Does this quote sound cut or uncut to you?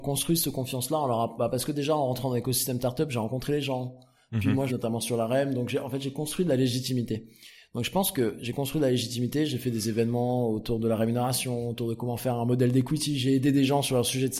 cut